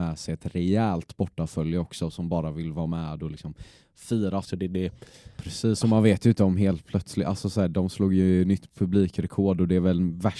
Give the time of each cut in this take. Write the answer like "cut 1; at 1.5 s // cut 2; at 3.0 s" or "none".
cut 1; at 4.4 s